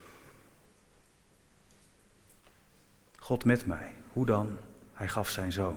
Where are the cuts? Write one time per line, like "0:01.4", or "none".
none